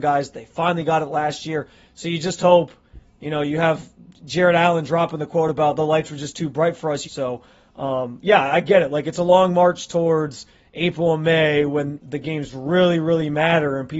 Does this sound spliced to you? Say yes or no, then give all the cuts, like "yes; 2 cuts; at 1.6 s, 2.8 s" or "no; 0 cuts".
yes; 1 cut; at 7.0 s